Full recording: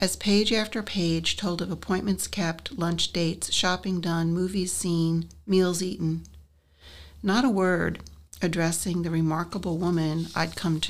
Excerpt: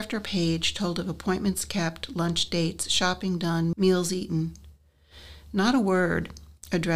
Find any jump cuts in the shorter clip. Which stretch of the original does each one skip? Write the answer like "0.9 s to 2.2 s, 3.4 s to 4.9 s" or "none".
4.4 s to 5.4 s